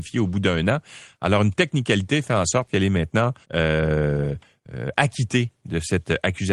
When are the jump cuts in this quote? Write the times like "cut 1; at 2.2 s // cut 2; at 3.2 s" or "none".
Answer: cut 1; at 3.4 s